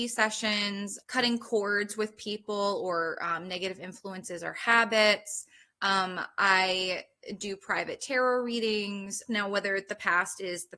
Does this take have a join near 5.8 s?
no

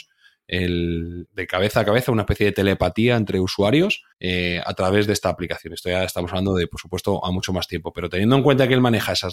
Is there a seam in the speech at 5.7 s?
no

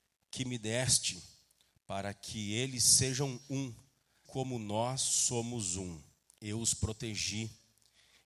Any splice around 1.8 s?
no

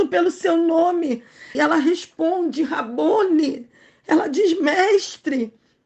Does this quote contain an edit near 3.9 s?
no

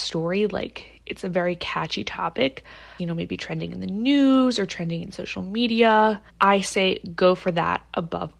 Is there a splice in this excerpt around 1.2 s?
no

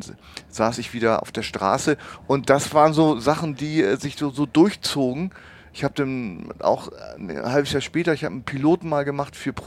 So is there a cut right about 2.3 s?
no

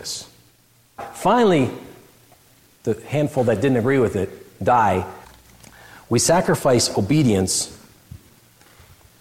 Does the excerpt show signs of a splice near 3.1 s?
no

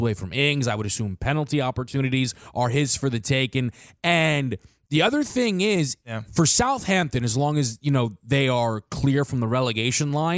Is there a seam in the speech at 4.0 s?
no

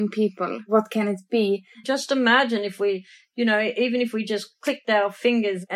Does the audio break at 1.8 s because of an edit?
yes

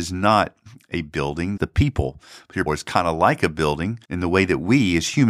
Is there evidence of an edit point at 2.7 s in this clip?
yes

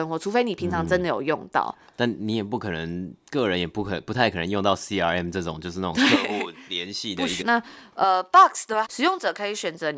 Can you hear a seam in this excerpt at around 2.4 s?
no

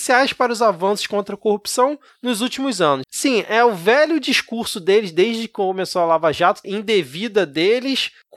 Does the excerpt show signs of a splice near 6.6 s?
yes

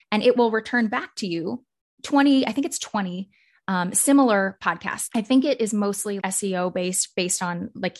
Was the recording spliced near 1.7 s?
no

